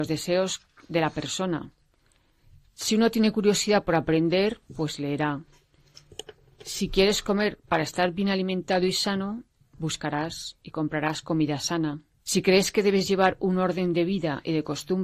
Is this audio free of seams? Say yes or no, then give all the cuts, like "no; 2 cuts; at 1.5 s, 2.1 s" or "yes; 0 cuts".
no; 1 cut; at 12.2 s